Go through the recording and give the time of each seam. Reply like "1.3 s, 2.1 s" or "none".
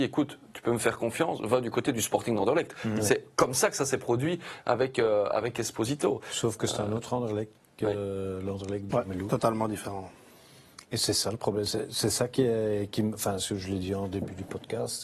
8.9 s